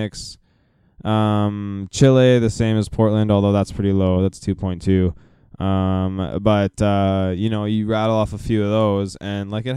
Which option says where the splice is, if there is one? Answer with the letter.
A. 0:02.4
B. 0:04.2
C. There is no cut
C